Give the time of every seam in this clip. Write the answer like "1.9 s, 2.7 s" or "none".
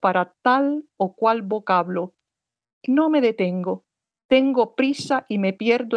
none